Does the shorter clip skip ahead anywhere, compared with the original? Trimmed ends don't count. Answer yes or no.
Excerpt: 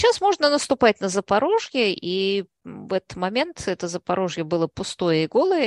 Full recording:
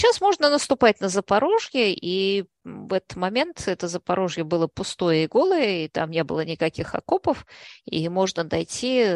no